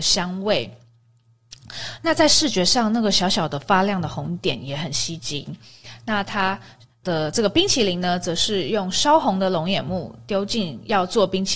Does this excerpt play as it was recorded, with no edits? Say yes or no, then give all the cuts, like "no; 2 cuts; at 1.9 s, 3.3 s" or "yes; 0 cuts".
no; 1 cut; at 7.0 s